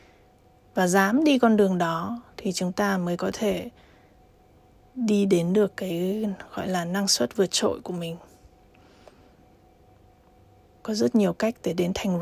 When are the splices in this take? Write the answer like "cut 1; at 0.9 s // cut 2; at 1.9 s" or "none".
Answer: cut 1; at 10.7 s